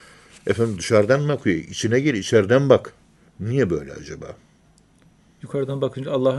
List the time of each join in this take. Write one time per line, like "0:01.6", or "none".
0:03.3